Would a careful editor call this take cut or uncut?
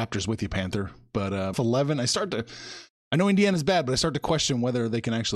cut